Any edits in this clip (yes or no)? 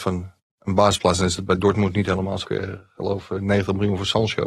yes